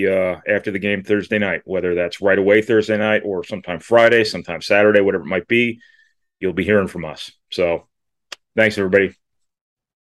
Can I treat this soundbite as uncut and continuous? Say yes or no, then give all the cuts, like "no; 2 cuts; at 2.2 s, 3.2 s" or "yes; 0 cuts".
yes; 0 cuts